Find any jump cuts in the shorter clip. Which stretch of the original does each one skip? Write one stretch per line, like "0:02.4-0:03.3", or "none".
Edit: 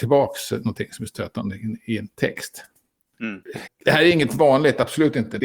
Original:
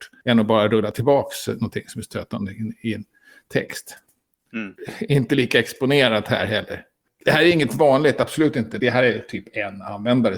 0:03.1-0:03.5
0:05.0-0:07.1